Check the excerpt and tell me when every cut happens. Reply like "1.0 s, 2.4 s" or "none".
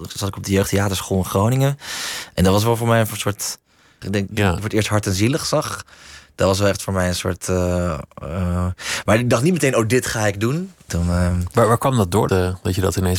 4.0 s, 10.9 s, 12.3 s